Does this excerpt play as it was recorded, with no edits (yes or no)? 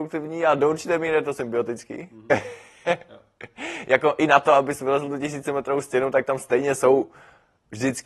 yes